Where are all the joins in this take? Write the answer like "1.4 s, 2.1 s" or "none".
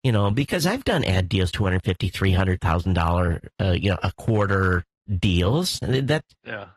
none